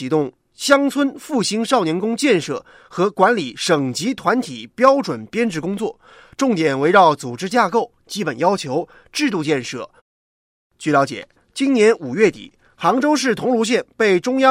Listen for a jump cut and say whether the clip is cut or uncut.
cut